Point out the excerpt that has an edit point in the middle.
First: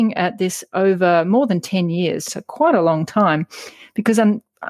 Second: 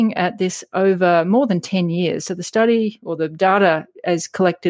first; 1 cut; at 2.3 s

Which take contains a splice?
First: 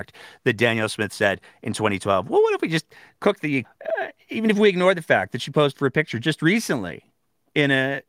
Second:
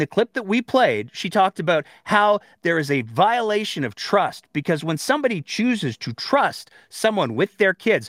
first; 1 cut; at 3.6 s

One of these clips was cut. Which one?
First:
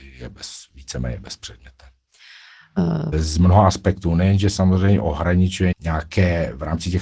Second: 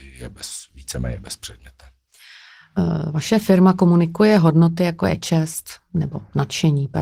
first; 2 cuts; at 3.1 s, 5.7 s

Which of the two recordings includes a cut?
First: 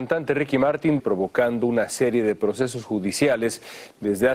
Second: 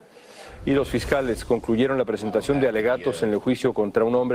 first; 1 cut; at 1.0 s

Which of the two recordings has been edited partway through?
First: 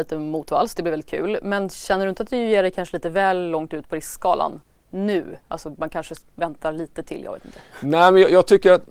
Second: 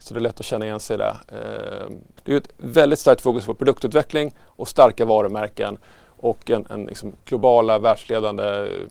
second; 2 cuts; at 2.2 s, 7.2 s

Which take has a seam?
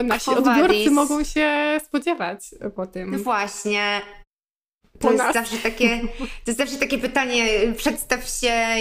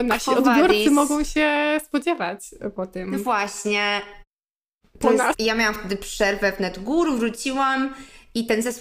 second; 1 cut; at 5.3 s

